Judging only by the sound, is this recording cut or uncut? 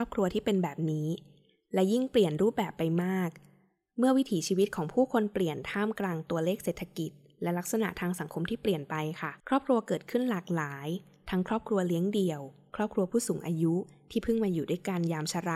cut